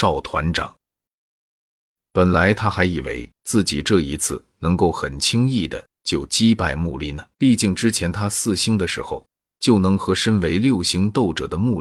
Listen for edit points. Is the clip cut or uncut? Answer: cut